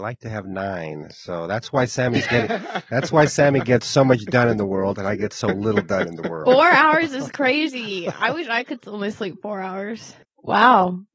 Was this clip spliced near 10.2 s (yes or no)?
yes